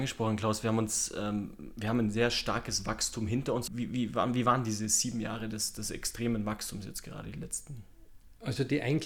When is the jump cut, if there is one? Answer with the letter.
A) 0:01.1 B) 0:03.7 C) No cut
B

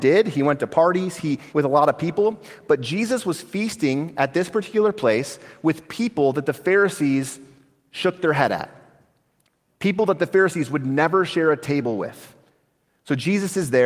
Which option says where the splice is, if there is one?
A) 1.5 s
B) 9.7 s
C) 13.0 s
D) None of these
A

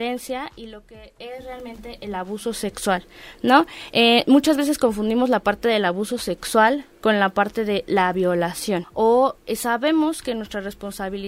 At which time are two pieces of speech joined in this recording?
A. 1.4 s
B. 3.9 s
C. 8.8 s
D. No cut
C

